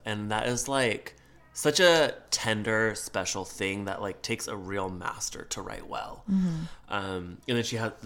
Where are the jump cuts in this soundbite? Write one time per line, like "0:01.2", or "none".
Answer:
none